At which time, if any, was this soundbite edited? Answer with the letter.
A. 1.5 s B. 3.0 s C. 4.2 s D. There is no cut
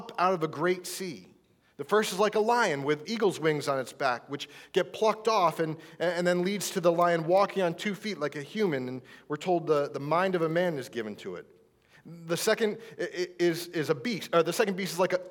B